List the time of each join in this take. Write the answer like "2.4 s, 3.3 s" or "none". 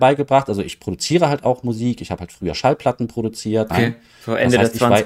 3.7 s